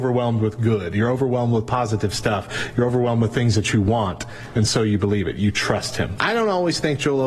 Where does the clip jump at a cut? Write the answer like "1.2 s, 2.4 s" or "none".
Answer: 6.2 s